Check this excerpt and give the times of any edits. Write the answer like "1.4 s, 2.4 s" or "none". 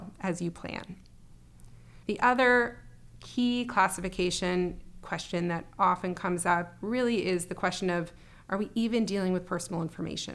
2.0 s